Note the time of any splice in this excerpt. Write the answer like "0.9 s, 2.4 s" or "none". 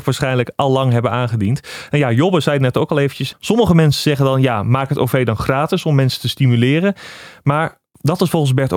3.3 s